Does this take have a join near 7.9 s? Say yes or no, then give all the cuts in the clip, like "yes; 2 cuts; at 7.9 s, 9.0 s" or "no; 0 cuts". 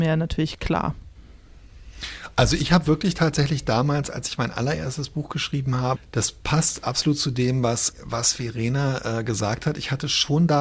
yes; 2 cuts; at 6.0 s, 7.9 s